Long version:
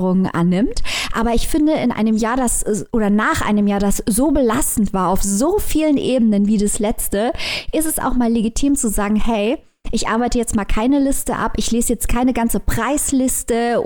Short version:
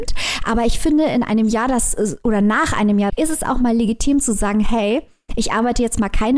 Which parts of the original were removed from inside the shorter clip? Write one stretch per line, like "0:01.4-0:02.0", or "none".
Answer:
0:03.8-0:07.7